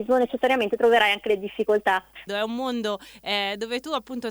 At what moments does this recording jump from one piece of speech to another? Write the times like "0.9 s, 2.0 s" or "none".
2.3 s